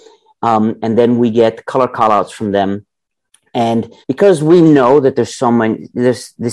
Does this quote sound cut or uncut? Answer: cut